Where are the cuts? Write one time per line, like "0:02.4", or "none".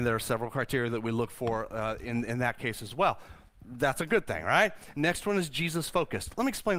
0:04.9